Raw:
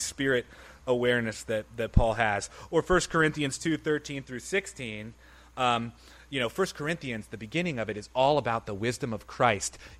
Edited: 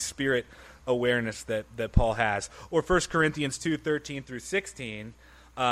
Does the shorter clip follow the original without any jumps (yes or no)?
yes